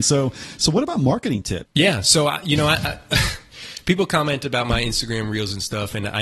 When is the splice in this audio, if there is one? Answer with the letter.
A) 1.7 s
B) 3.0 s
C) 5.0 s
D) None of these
A